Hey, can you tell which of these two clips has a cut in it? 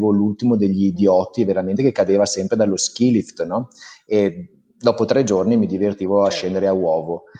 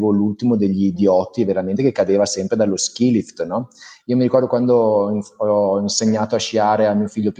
second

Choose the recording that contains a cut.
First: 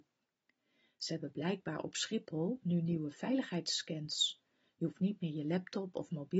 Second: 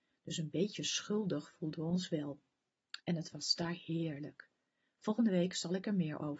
second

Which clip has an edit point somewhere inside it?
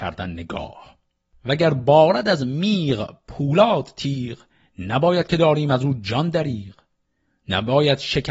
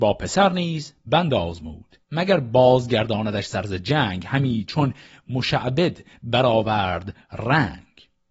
second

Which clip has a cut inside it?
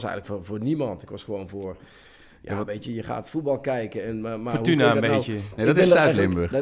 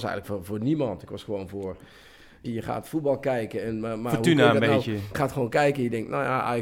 second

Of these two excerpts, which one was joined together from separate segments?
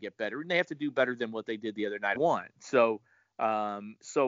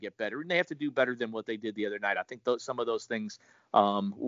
first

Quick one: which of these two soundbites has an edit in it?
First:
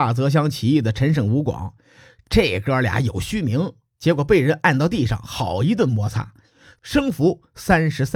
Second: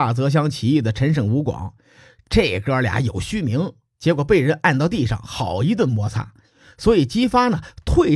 first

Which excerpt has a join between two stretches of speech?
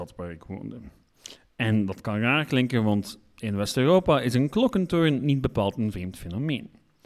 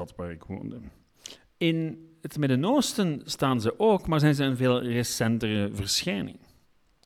second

